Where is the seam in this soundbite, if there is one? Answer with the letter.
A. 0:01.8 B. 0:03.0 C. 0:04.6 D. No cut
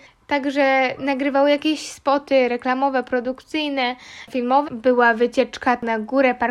C